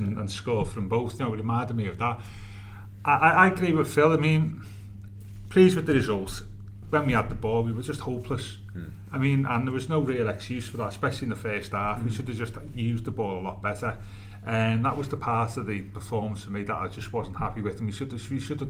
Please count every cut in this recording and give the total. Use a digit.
1